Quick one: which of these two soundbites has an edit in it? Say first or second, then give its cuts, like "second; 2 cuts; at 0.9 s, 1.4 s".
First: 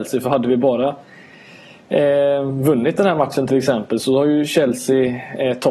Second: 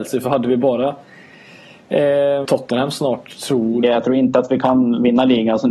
second; 2 cuts; at 2.4 s, 3.8 s